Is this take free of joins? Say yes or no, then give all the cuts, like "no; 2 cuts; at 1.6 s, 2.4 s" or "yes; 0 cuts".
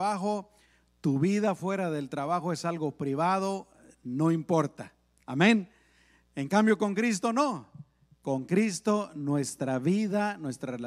yes; 0 cuts